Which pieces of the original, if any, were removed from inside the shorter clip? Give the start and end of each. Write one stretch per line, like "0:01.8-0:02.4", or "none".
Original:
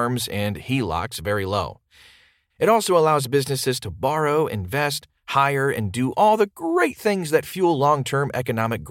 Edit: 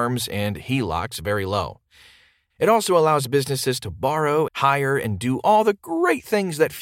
0:04.5-0:05.2